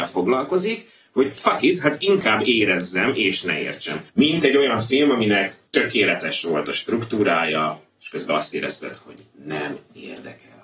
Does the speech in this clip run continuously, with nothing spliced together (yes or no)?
yes